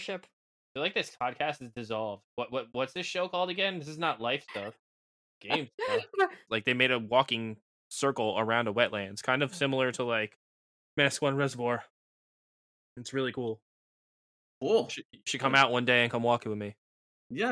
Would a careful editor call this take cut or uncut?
cut